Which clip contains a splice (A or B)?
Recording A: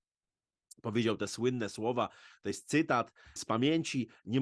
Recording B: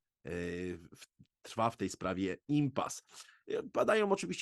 A